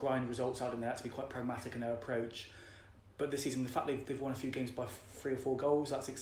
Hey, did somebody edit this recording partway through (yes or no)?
no